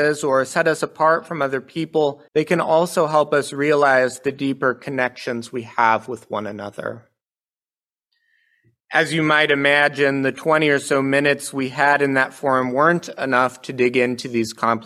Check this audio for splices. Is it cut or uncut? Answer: cut